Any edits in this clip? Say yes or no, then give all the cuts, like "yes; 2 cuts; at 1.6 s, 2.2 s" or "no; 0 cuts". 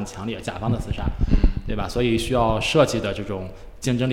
no; 0 cuts